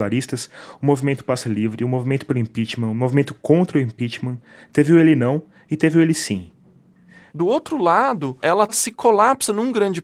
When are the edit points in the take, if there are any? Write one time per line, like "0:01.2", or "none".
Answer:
0:07.3
0:08.4